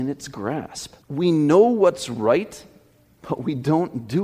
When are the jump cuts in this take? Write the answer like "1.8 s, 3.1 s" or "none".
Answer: 1.0 s